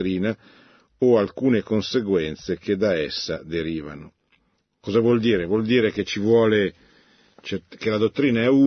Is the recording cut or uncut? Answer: uncut